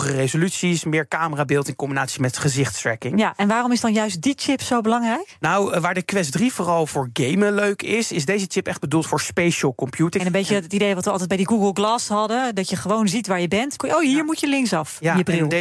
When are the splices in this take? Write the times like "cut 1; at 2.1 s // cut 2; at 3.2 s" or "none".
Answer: cut 1; at 10.2 s // cut 2; at 13.8 s